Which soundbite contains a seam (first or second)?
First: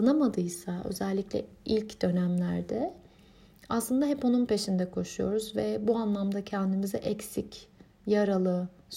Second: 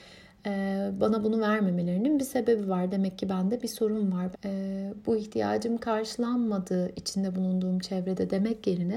second